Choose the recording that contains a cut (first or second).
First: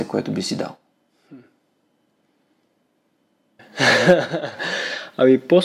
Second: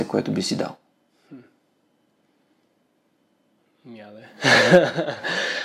first